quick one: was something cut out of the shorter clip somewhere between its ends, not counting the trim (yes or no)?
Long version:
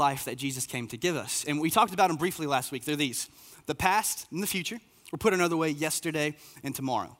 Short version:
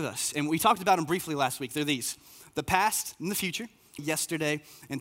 yes